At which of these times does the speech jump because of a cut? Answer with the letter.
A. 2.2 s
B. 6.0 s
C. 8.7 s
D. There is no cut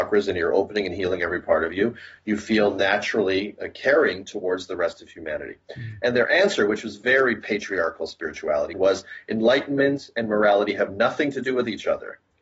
C